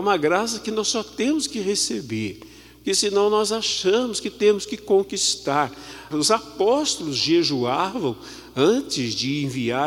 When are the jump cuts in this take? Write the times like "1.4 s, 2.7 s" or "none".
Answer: 6.1 s